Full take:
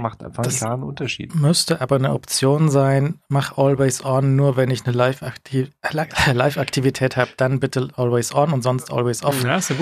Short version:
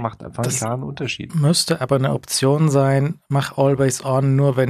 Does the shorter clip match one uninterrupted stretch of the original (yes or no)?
yes